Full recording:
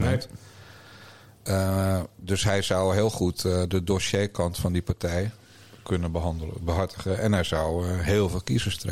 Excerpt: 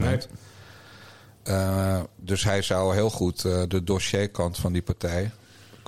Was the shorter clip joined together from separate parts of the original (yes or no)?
no